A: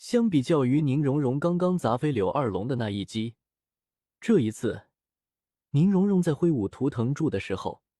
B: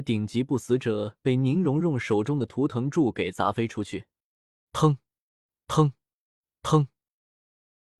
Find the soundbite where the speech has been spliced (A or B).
B